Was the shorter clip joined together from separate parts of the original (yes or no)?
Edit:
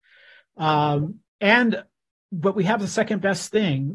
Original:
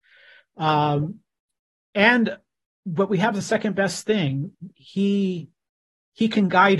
yes